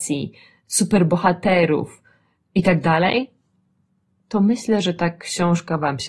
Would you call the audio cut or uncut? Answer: uncut